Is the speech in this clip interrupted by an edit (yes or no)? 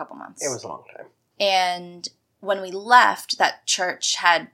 yes